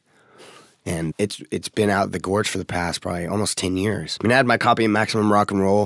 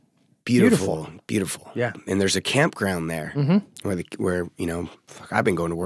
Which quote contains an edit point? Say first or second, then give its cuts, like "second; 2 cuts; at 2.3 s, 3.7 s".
first; 2 cuts; at 1.1 s, 4.2 s